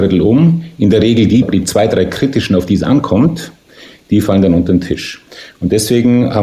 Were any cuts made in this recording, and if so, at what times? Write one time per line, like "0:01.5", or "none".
0:01.4